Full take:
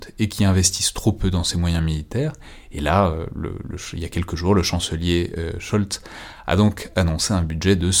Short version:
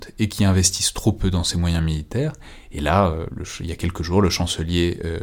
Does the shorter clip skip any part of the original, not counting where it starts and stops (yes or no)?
yes